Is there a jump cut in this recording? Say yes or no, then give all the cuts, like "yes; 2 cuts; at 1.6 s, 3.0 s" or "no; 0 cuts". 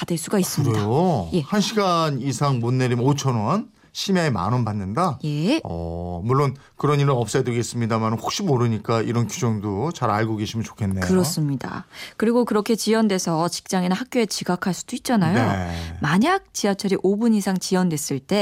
no; 0 cuts